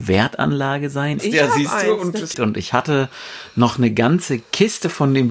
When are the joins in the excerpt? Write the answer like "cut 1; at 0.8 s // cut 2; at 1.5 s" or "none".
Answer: cut 1; at 1.2 s // cut 2; at 2.3 s